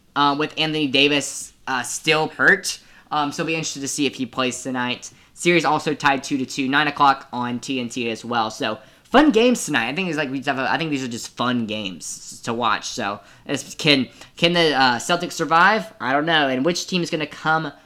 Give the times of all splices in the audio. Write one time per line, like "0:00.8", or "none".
0:02.3